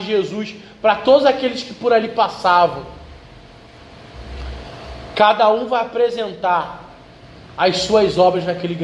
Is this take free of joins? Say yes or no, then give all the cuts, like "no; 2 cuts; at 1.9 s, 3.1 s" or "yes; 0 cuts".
yes; 0 cuts